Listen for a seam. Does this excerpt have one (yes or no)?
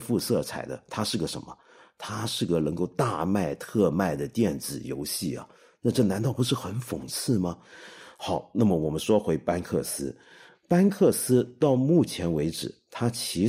no